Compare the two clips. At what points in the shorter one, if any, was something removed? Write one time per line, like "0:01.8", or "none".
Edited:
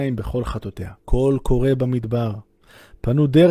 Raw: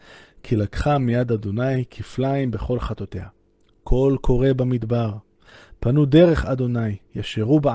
0:01.0